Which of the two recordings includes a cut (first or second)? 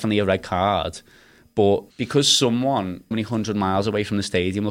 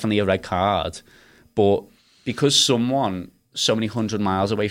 first